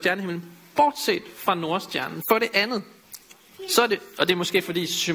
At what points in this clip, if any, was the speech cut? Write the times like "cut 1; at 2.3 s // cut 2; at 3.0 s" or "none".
cut 1; at 2.2 s